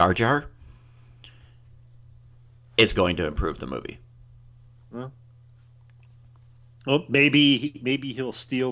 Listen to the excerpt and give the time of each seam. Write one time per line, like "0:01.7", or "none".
0:02.9